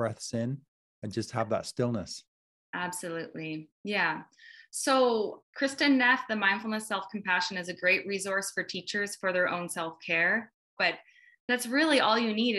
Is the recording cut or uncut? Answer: cut